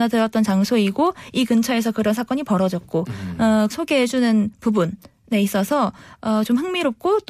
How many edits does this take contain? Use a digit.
1